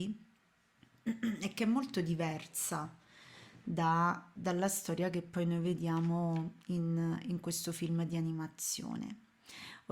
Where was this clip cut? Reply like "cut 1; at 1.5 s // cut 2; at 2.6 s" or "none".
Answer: cut 1; at 4.4 s